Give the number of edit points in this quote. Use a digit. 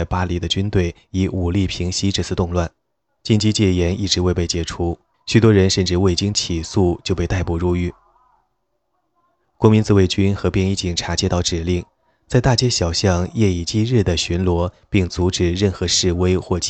2